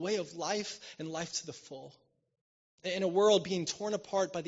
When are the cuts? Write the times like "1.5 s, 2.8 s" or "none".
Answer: 2.8 s